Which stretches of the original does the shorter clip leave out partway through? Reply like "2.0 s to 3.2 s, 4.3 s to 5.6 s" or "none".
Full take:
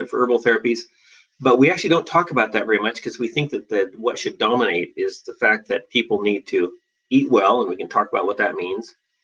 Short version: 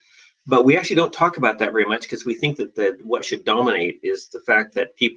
none